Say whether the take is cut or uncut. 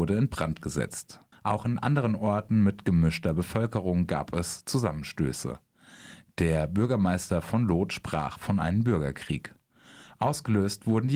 cut